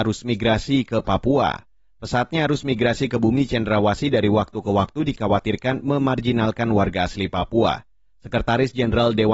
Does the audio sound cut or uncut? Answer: uncut